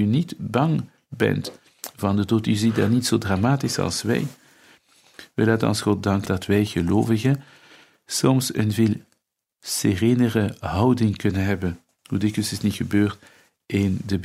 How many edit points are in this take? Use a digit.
1